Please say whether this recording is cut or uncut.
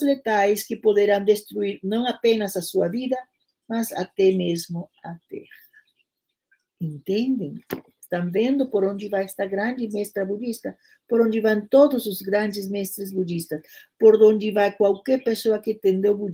uncut